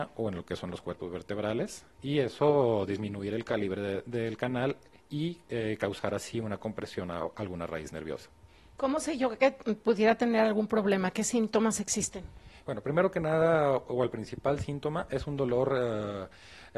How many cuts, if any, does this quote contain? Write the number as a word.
zero